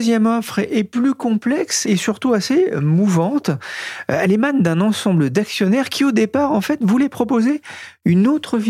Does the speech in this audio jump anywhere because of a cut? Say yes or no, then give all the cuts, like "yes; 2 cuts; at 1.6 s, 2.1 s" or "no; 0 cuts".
yes; 1 cut; at 1.8 s